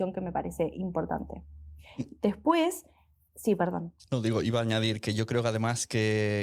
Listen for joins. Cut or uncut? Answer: uncut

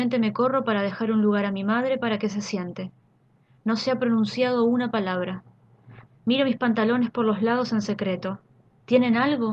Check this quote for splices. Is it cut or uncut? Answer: cut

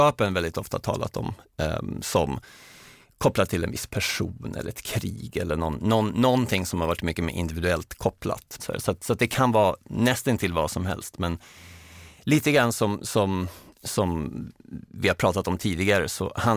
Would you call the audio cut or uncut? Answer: cut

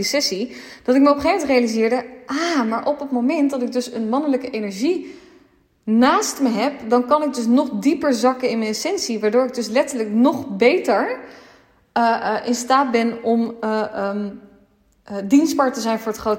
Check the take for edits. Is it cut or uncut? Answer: uncut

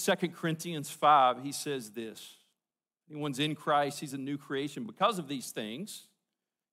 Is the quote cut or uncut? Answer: uncut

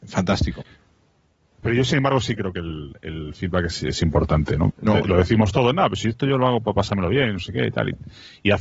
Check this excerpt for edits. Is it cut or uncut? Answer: cut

